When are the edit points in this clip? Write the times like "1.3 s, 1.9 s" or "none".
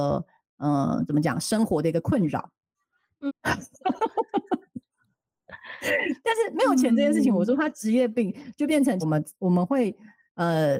3.3 s, 9.0 s